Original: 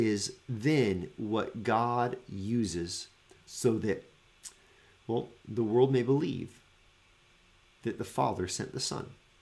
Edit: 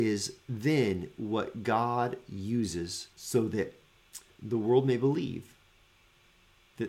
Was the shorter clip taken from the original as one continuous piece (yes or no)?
no